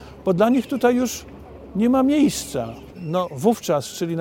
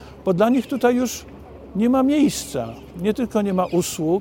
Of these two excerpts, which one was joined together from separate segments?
first; 1 cut; at 2.9 s

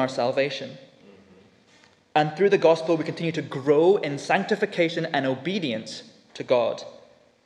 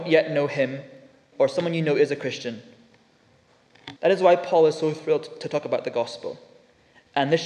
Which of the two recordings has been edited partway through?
second; 2 cuts; at 1.3 s, 4.0 s

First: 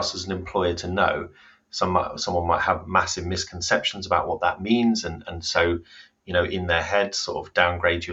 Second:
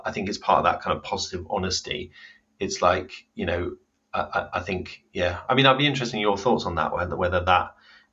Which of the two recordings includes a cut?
first; 1 cut; at 1.6 s

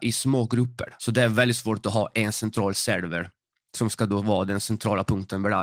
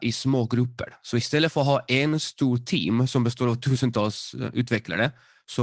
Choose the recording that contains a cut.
first; 1 cut; at 1.0 s

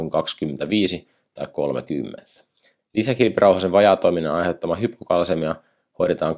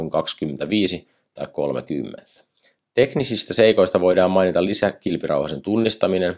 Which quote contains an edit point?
first; 1 cut; at 2.8 s

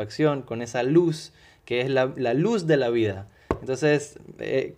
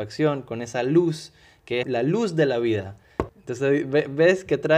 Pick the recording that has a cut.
second; 2 cuts; at 1.8 s, 3.3 s

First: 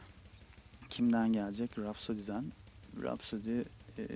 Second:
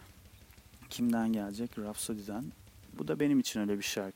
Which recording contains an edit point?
second; 1 cut; at 3.0 s

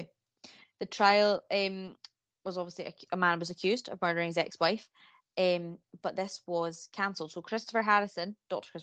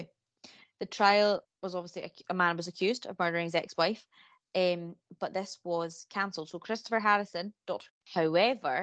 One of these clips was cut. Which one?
second; 2 cuts; at 1.4 s, 7.9 s

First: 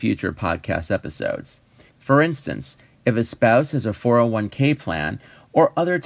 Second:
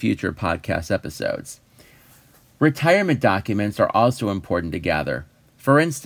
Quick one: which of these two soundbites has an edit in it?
first; 1 cut; at 1.9 s

